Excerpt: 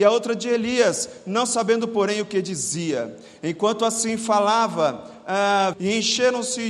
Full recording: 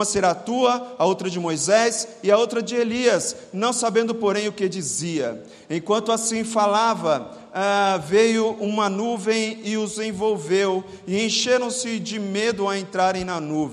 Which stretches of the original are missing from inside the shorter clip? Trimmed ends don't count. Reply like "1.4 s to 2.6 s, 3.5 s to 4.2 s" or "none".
8.0 s to 11.0 s